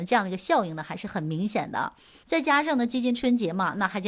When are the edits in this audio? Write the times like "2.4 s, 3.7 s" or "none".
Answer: 2.2 s